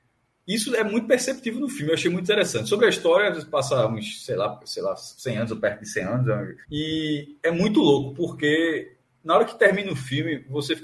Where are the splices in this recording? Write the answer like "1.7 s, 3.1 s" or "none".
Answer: 6.6 s